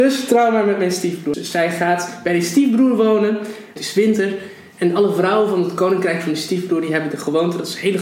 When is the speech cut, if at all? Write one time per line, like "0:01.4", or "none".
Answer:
0:01.3
0:03.8